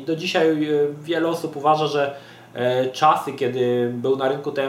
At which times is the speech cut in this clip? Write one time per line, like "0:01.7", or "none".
none